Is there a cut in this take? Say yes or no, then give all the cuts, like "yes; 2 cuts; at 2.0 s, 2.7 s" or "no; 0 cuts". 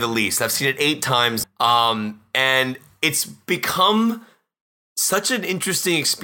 yes; 1 cut; at 1.4 s